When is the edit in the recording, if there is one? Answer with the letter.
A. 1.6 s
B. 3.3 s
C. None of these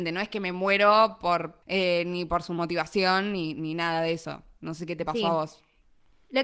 A